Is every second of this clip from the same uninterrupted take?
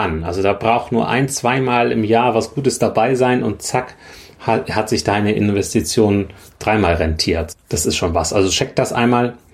yes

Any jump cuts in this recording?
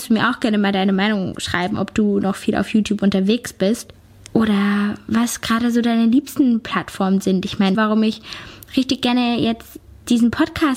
yes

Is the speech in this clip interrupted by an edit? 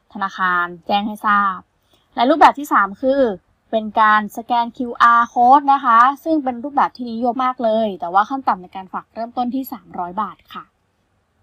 yes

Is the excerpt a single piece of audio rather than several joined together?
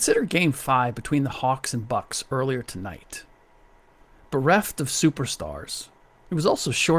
yes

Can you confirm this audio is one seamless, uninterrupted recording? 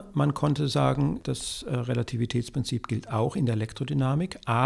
yes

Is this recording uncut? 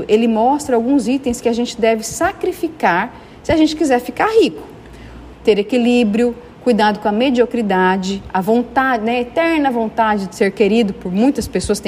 no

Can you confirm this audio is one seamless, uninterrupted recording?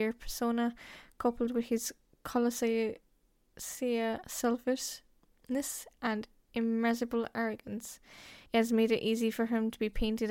no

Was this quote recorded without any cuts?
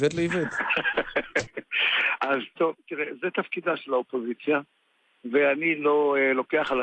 yes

